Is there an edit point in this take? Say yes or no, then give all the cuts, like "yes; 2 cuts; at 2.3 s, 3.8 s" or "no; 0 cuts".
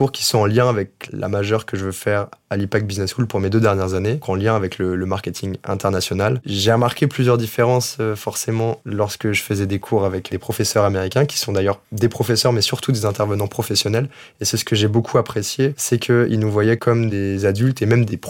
yes; 1 cut; at 4.2 s